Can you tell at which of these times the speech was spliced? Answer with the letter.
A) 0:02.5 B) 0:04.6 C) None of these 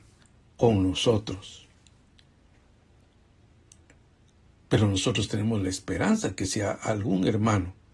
B